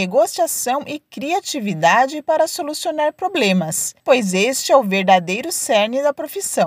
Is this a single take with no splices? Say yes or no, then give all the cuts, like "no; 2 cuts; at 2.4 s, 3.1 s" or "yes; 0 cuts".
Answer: yes; 0 cuts